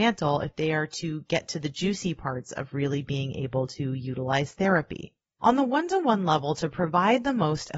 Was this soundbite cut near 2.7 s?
no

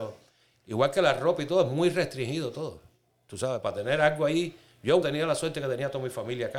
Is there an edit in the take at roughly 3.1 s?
no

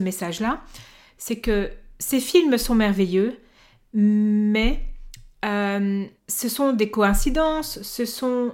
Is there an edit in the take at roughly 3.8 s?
no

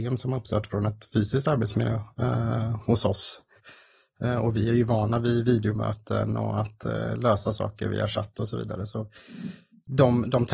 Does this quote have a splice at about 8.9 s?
no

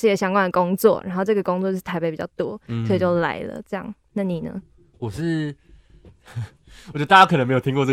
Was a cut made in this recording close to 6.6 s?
no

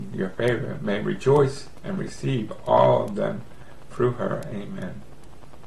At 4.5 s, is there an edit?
no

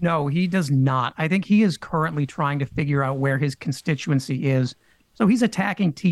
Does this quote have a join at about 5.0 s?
no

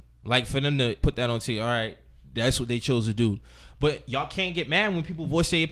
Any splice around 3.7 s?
no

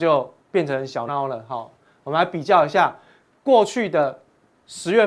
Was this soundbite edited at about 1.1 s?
yes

